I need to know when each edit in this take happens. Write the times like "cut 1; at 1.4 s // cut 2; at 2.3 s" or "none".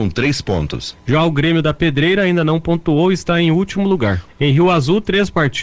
cut 1; at 4.3 s